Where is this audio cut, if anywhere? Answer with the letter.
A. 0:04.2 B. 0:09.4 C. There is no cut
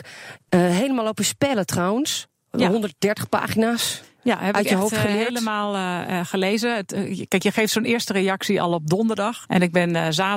B